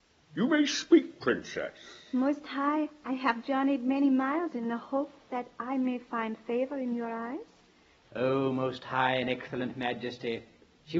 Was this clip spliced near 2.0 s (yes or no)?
no